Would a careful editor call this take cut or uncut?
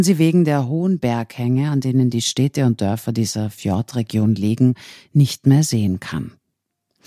uncut